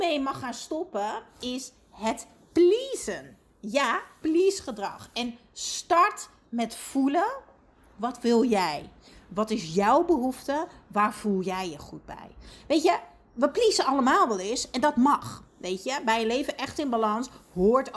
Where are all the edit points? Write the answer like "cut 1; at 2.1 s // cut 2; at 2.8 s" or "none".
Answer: none